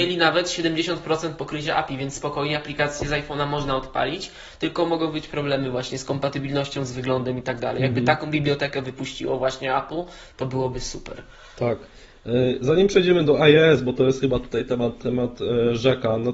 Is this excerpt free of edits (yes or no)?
yes